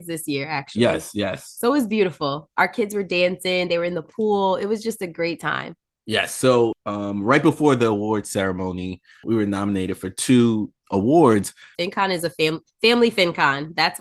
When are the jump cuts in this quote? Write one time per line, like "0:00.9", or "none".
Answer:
0:11.7

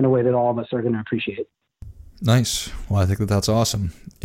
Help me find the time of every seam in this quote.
none

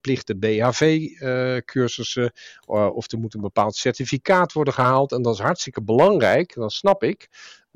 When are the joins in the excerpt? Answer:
none

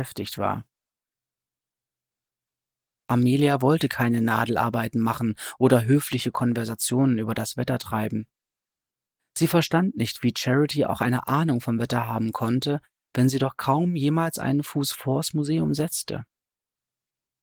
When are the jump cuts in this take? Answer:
none

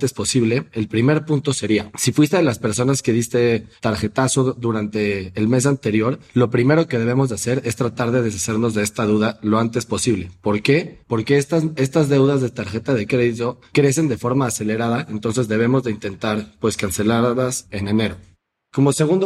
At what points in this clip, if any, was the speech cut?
none

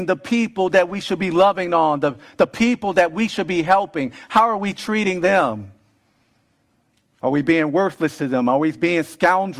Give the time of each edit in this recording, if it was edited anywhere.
none

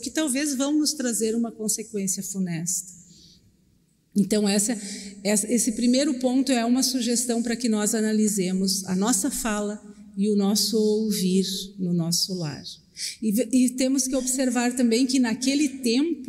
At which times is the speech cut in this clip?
none

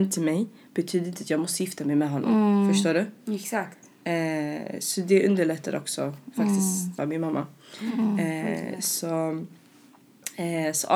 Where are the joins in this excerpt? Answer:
0:07.0

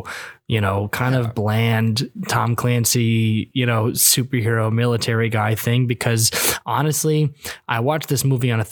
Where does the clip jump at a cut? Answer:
none

